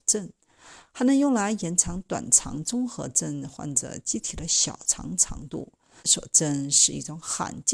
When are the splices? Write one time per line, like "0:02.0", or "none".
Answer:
0:06.0